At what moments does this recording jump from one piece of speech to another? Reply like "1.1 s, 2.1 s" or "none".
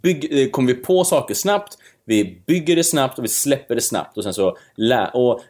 none